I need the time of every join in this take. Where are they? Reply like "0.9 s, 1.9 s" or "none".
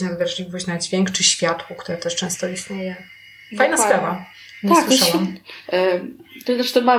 5.6 s